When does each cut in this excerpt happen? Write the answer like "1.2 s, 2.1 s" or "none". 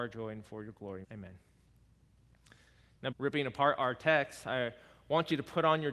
1.0 s, 3.1 s

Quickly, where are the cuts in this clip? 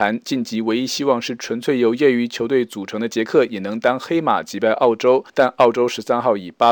5.3 s

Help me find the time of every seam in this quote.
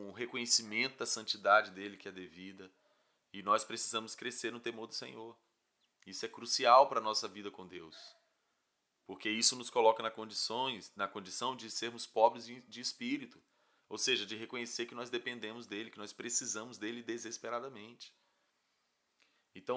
none

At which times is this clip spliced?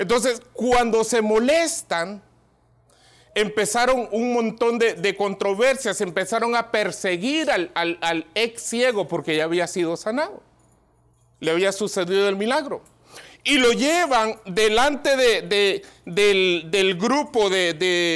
none

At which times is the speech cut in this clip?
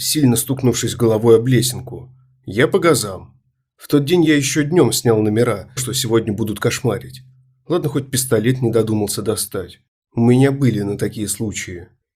5.8 s

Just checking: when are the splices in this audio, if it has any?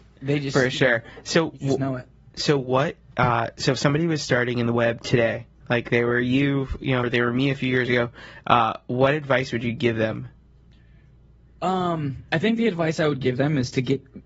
7.0 s

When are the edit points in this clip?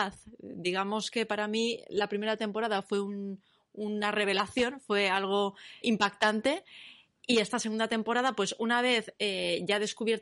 5.8 s

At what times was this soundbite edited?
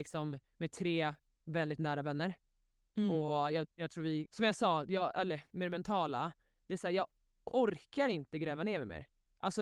4.3 s

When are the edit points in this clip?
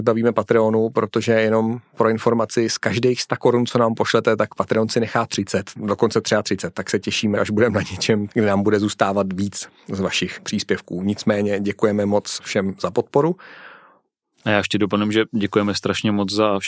none

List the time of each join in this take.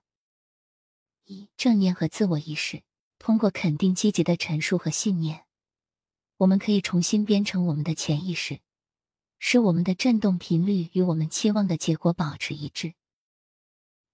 1.5 s, 3.1 s

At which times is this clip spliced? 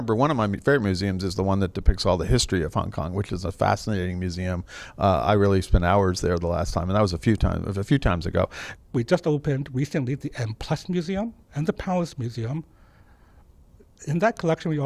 8.8 s, 11.4 s

